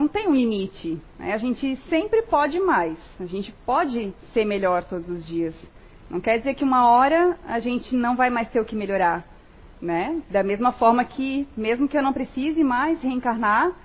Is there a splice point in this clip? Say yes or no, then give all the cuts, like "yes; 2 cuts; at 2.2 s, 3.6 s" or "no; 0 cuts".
no; 0 cuts